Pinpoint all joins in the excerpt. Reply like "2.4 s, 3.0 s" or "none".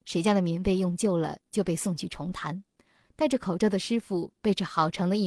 none